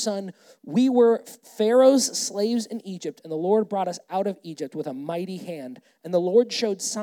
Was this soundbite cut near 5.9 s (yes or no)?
no